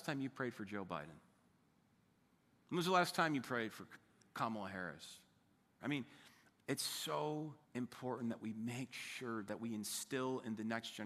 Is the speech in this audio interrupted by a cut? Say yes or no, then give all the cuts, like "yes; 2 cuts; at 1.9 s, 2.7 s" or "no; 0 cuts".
yes; 2 cuts; at 5.8 s, 7.6 s